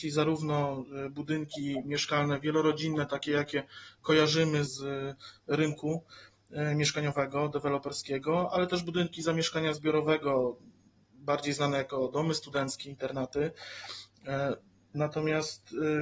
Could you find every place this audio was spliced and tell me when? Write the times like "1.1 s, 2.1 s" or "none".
4.7 s, 14.9 s

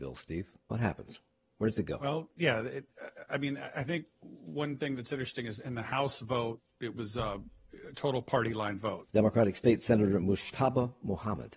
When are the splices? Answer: 9.1 s

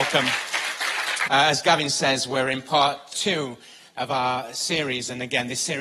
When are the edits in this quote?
1.3 s, 3.1 s

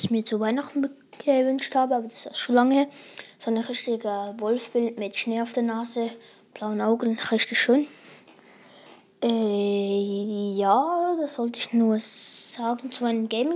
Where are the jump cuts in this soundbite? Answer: none

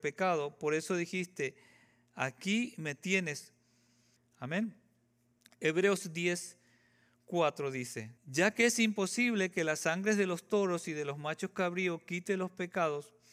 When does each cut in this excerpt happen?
4.2 s, 8.2 s

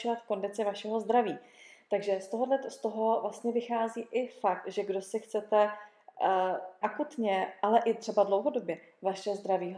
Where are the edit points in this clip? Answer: 6.8 s

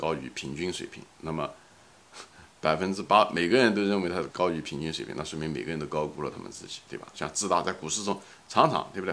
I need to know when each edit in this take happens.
4.3 s, 7.1 s

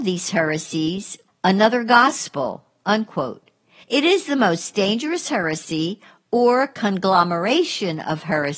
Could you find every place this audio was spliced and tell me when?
1.3 s, 3.8 s

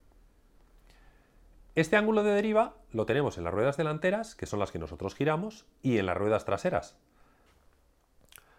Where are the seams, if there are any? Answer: none

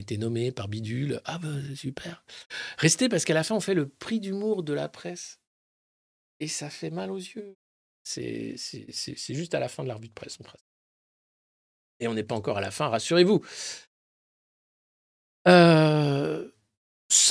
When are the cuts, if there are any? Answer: 7.8 s

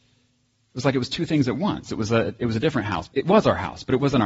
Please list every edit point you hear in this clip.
1.9 s, 3.1 s

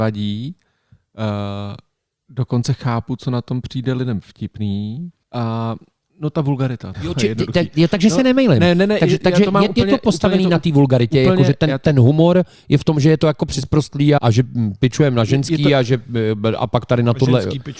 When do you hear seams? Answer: 5.2 s, 6.9 s, 14.2 s

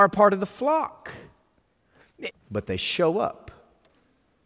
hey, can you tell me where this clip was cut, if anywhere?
2.3 s

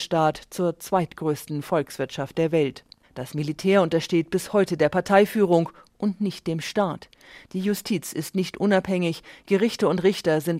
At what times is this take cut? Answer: 3.0 s

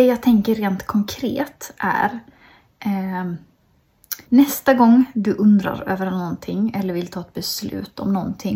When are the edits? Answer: 4.2 s

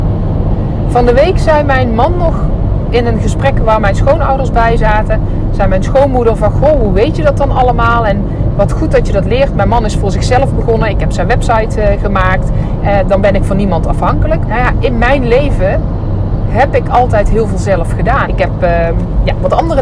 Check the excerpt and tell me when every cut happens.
12.8 s, 14.5 s, 18.3 s

